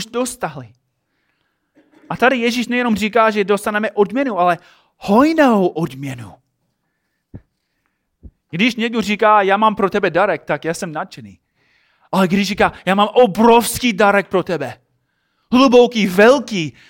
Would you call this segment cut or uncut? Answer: uncut